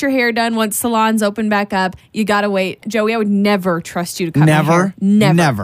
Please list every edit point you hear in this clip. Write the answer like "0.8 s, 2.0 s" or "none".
none